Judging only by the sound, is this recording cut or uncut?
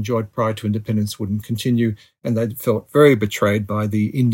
uncut